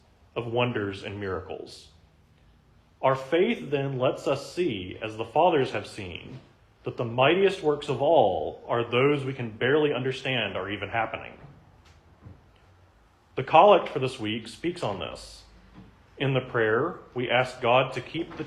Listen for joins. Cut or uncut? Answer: uncut